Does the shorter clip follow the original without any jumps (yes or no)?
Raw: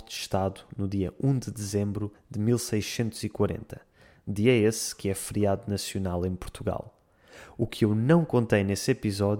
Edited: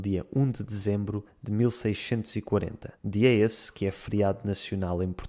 no